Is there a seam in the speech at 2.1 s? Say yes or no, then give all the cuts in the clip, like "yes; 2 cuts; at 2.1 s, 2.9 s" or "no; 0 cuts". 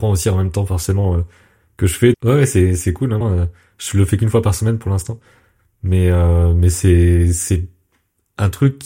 yes; 2 cuts; at 2.1 s, 3.2 s